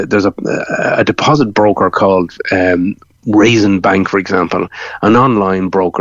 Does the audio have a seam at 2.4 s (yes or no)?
no